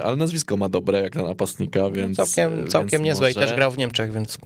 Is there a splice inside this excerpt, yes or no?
no